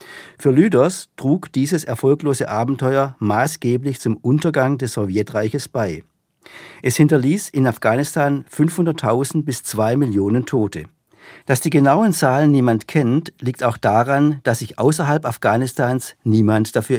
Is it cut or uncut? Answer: uncut